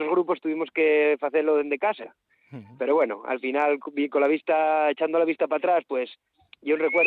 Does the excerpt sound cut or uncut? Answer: uncut